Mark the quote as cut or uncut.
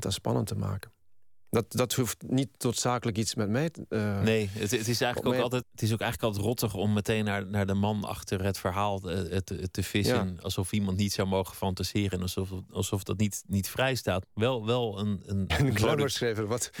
cut